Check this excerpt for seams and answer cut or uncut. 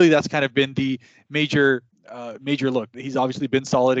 cut